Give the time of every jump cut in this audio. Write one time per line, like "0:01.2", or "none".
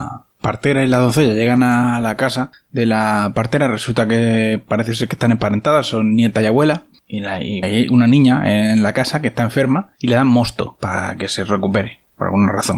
0:07.6
0:09.9

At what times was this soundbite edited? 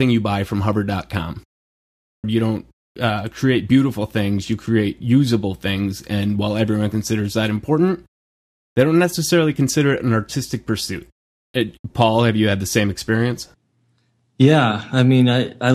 0:02.2

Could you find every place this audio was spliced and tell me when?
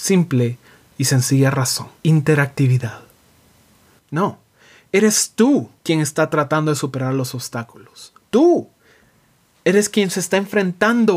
0:02.0
0:04.0
0:05.8

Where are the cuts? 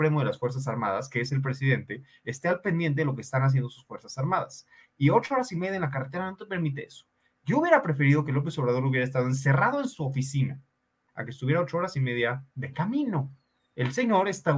0:11.1
0:12.5

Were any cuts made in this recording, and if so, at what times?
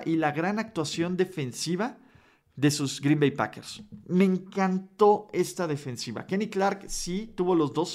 none

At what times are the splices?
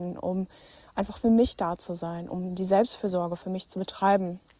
none

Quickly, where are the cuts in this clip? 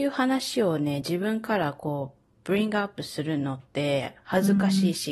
none

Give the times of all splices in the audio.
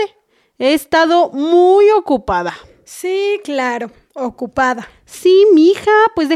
none

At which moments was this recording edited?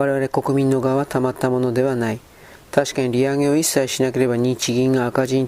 none

